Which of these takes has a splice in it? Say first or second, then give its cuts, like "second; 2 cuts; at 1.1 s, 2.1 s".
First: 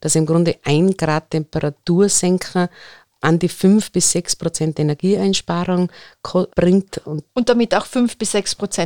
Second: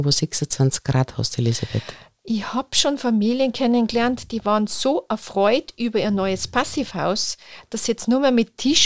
first; 1 cut; at 6.5 s